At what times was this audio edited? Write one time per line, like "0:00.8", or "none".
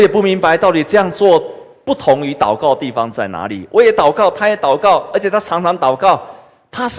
none